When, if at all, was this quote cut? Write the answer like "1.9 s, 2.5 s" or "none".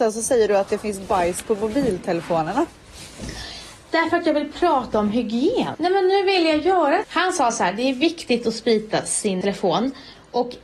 5.7 s, 7.0 s, 9.4 s